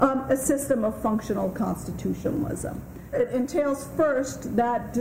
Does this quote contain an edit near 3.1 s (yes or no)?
yes